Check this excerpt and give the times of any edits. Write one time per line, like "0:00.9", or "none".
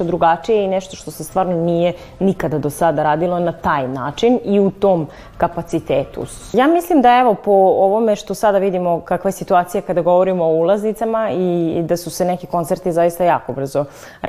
0:06.5